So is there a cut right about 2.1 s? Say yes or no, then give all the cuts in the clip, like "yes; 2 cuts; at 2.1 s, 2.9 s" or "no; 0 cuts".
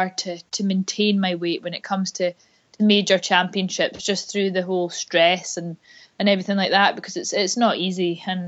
no; 0 cuts